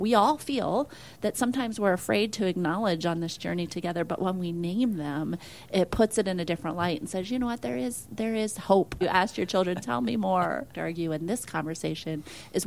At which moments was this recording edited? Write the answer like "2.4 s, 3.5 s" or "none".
9.0 s, 10.7 s